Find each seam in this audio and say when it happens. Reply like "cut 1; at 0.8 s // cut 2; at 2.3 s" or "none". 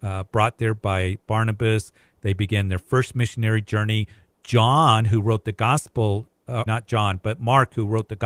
cut 1; at 6.7 s